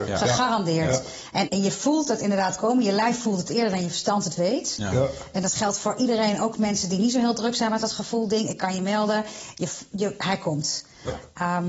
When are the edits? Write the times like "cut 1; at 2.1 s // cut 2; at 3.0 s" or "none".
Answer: cut 1; at 1.5 s